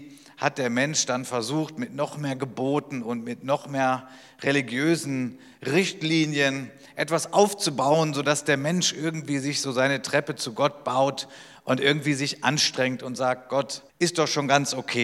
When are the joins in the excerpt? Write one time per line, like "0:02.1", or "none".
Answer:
0:13.9